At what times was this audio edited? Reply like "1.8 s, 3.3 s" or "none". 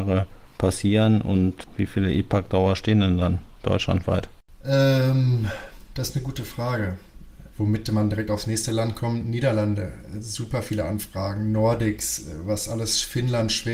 7.5 s